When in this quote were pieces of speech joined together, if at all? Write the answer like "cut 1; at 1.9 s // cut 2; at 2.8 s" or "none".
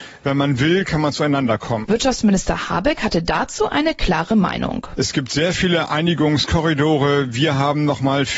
cut 1; at 1.8 s